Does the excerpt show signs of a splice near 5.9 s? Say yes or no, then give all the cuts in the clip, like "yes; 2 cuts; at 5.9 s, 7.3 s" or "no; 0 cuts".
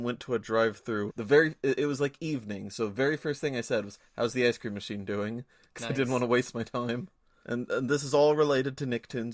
no; 2 cuts; at 1.1 s, 7.4 s